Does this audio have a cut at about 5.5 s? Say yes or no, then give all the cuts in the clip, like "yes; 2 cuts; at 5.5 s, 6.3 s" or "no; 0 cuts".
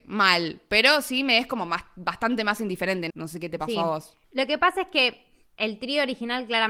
no; 2 cuts; at 3.1 s, 4.2 s